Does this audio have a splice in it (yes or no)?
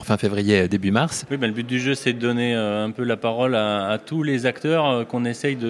no